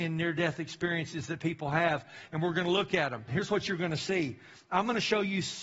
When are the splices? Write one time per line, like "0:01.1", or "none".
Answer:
0:03.3